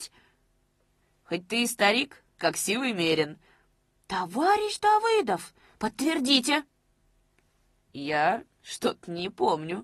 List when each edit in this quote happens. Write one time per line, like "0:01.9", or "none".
0:02.4